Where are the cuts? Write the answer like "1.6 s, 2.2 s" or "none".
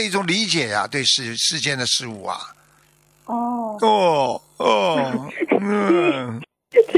none